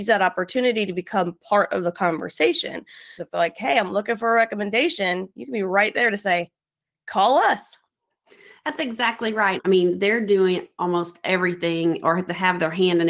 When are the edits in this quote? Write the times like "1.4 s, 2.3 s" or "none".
3.2 s, 9.6 s